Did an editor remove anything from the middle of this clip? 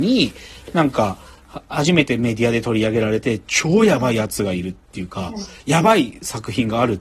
no; 0 cuts

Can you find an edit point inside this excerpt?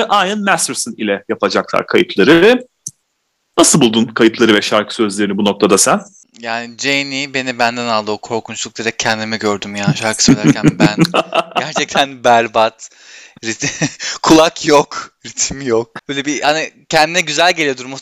no; 0 cuts

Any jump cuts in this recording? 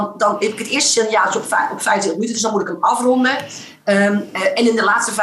no; 0 cuts

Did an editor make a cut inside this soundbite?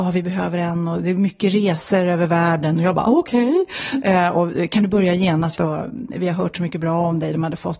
yes; 1 cut; at 5.6 s

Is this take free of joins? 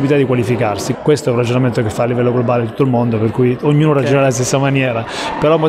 no; 1 cut; at 1.0 s

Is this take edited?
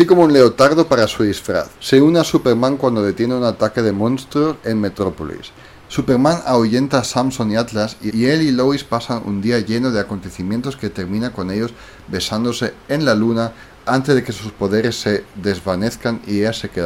yes; 3 cuts; at 1.7 s, 5.9 s, 8.1 s

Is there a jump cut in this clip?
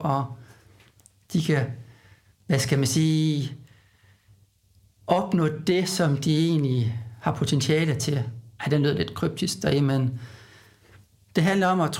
no; 0 cuts

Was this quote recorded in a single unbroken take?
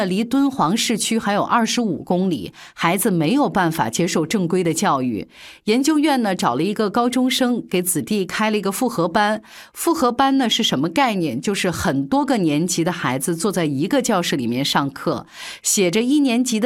yes; 0 cuts

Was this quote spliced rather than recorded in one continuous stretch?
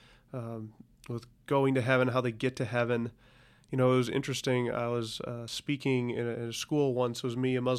no; 0 cuts

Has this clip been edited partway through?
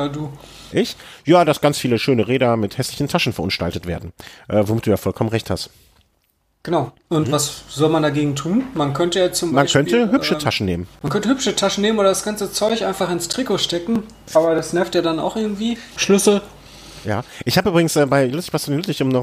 yes; 2 cuts; at 10.9 s, 16.0 s

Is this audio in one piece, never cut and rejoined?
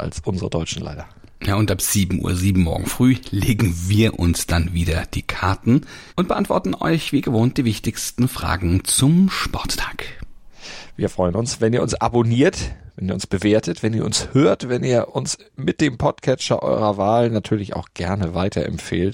no; 1 cut; at 6.1 s

